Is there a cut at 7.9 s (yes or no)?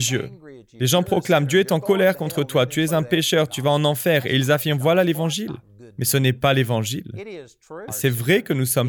yes